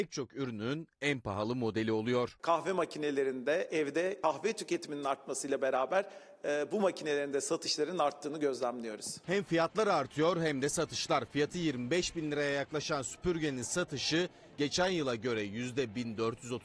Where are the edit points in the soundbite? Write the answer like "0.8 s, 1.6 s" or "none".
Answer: none